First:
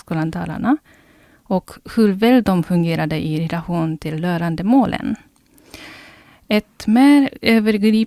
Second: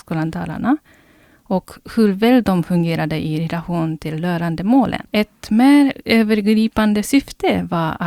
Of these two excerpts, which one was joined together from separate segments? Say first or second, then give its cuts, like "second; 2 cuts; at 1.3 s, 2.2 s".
second; 1 cut; at 5.0 s